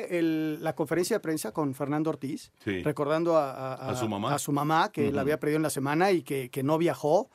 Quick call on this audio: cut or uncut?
uncut